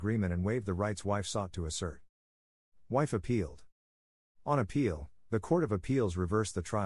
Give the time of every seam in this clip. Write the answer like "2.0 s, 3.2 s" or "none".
none